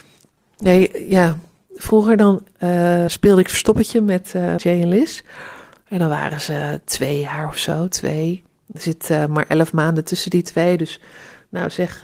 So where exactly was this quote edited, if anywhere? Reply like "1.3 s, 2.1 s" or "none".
3.1 s, 4.6 s